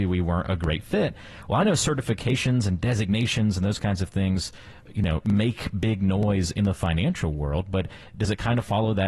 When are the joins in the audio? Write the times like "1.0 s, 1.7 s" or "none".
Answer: none